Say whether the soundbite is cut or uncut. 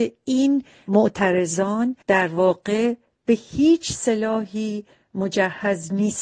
cut